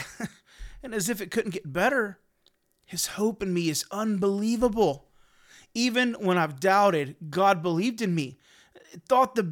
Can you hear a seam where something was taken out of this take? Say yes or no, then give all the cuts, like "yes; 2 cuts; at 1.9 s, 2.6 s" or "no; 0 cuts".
no; 0 cuts